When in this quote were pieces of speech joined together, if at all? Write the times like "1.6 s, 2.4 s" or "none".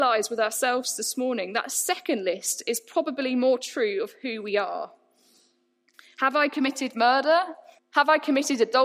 7.8 s